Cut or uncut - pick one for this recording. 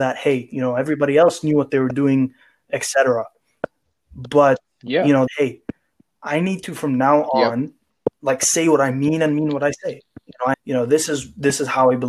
cut